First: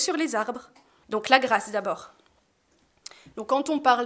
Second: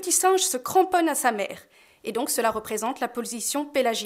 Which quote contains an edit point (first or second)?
first